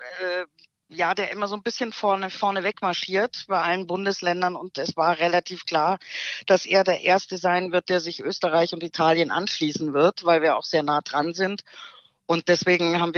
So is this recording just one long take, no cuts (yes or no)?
yes